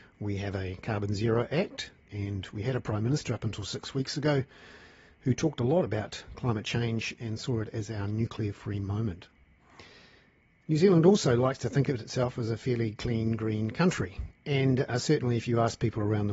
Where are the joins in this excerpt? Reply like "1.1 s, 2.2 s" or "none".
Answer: 14.3 s